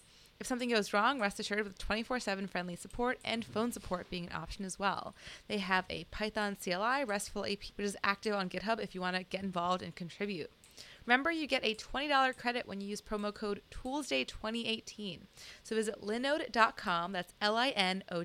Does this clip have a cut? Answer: yes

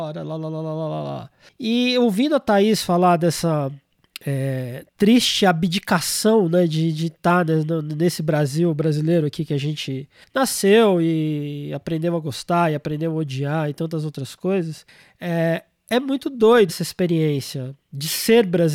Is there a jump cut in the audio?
yes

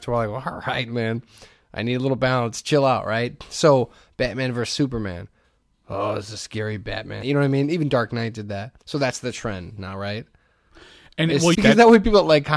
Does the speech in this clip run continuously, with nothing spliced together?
no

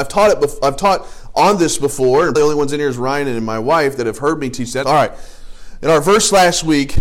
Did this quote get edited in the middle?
yes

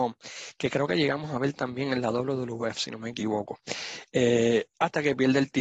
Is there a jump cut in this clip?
no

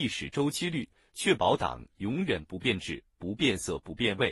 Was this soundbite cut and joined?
no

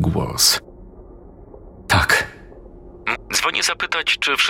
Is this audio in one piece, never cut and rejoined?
no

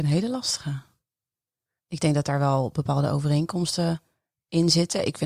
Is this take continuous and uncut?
yes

